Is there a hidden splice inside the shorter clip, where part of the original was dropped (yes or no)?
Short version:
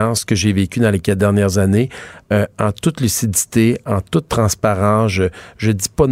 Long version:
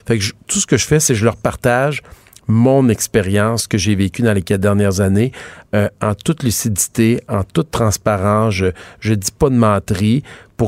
no